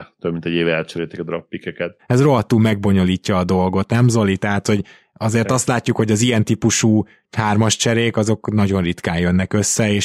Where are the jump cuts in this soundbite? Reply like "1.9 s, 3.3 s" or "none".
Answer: 2.0 s